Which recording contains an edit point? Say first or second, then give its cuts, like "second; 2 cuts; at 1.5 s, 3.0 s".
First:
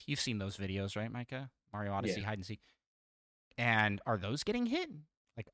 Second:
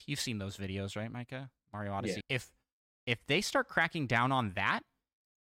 second; 1 cut; at 2.2 s